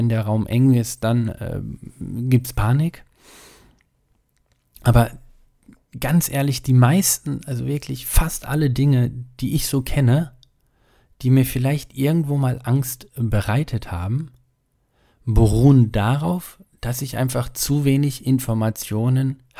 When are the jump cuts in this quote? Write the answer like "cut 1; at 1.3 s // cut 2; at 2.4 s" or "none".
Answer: none